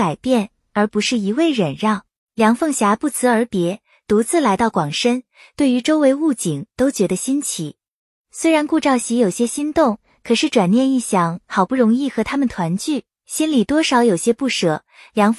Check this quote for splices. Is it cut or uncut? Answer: cut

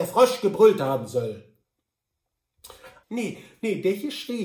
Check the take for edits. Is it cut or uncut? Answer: cut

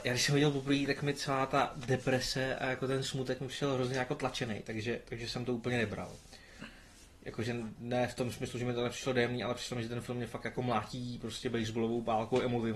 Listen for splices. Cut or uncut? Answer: uncut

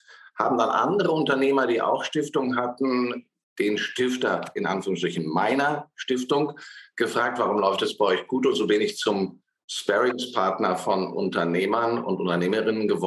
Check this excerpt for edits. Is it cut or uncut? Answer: uncut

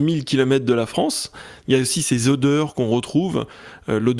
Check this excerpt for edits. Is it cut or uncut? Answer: cut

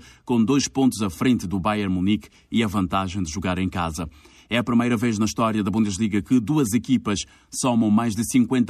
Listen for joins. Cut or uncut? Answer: uncut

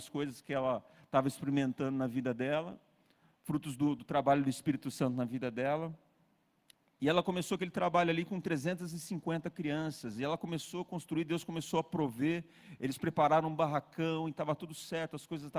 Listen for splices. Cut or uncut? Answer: uncut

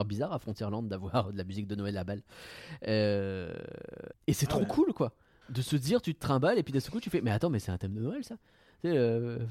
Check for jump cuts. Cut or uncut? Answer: cut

